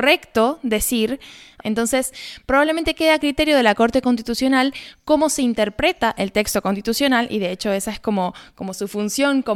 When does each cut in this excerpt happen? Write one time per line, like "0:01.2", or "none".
0:01.6